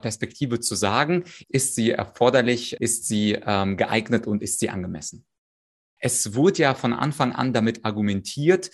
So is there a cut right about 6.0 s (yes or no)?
yes